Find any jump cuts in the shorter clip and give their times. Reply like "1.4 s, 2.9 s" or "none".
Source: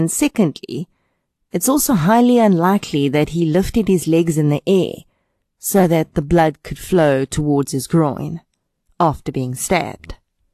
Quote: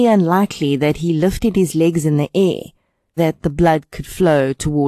3.2 s